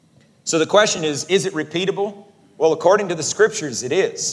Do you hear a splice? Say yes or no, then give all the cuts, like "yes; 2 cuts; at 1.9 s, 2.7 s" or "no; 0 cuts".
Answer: no; 0 cuts